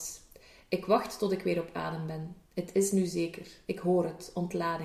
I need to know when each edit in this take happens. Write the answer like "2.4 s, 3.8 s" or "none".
2.4 s